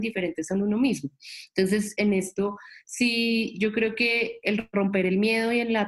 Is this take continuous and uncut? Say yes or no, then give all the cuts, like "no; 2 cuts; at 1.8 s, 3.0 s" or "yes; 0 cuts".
yes; 0 cuts